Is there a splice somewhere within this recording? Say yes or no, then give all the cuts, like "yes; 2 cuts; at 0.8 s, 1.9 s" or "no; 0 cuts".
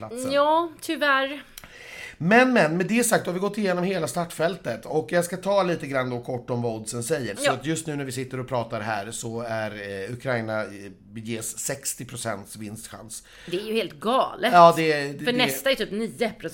yes; 1 cut; at 7.3 s